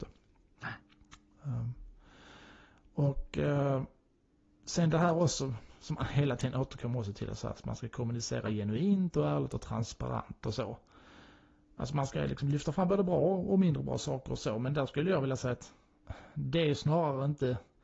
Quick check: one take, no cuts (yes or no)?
yes